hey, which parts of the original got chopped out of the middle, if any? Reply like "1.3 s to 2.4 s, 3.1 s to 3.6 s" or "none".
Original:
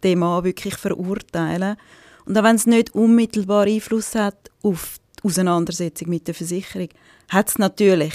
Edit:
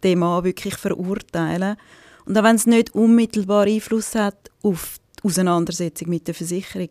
none